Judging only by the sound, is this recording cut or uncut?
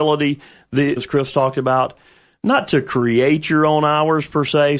cut